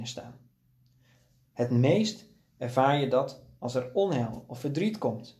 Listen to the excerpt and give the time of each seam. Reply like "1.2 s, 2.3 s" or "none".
none